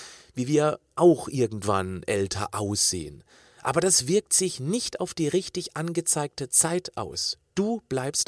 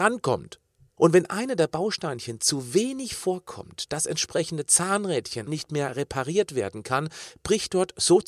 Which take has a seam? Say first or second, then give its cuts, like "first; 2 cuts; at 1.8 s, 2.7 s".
second; 2 cuts; at 1.0 s, 5.5 s